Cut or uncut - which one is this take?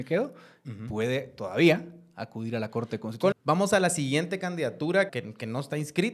cut